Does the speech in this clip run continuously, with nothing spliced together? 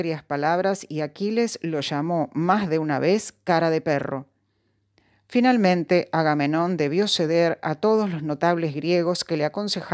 yes; 0 cuts

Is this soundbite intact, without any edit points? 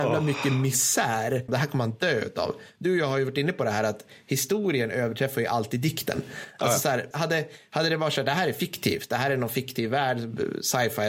no; 2 cuts; at 1.5 s, 7.1 s

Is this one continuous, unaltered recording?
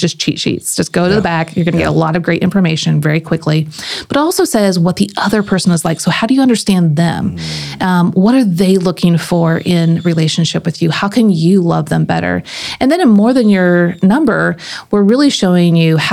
yes; 0 cuts

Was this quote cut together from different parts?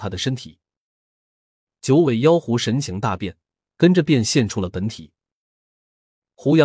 no; 0 cuts

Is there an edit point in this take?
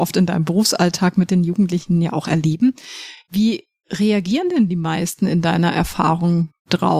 no; 0 cuts

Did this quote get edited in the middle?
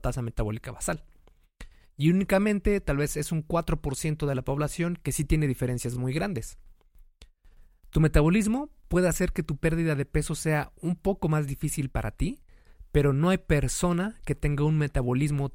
no; 0 cuts

